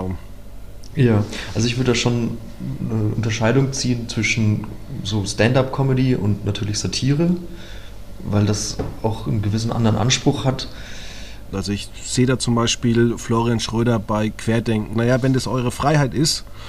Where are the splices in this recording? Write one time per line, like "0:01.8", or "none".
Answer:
0:11.5
0:14.9